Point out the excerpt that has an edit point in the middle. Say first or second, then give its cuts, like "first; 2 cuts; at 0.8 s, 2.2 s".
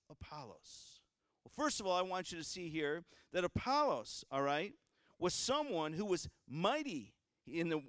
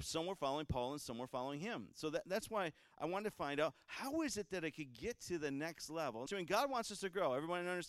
second; 1 cut; at 6.3 s